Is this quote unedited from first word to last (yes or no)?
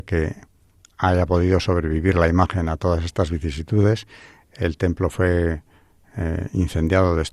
yes